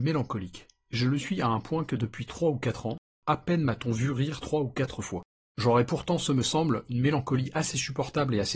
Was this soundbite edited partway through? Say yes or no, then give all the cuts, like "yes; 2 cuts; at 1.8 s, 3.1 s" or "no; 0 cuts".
no; 0 cuts